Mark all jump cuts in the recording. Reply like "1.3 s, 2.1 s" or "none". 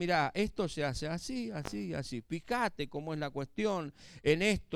none